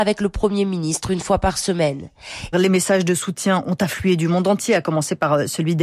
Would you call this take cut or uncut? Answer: cut